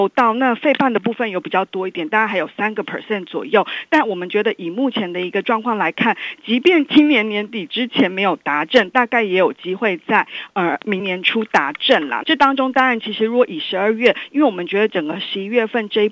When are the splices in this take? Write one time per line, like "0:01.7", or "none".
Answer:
0:11.0
0:12.2